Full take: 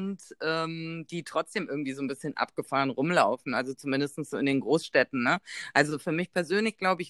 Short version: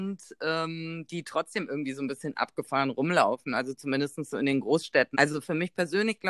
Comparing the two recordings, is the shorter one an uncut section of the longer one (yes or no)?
no